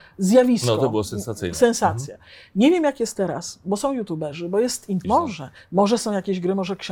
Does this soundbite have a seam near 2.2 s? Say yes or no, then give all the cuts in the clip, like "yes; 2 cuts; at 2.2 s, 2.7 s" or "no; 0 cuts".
no; 1 cut; at 5.0 s